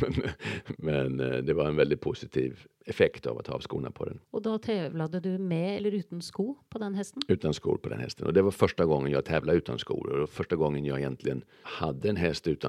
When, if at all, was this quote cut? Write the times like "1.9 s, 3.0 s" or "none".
4.2 s